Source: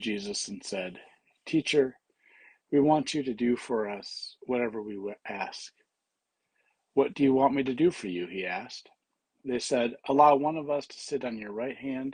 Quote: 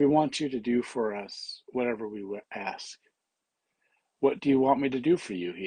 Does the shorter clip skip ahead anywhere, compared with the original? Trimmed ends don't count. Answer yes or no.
no